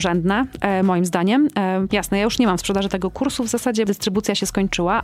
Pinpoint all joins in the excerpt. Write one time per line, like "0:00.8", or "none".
0:01.9
0:03.8